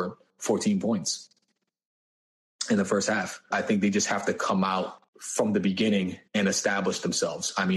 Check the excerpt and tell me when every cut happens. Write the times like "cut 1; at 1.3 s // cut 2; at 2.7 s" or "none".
cut 1; at 3.5 s // cut 2; at 5.1 s // cut 3; at 6.3 s